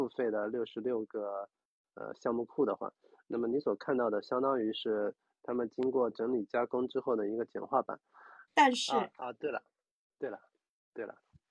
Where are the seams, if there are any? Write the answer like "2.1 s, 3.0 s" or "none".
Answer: 8.5 s